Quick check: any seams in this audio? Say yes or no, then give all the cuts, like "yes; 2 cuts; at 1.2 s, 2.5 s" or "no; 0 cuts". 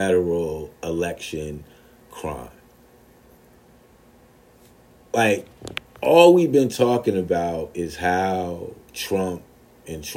no; 0 cuts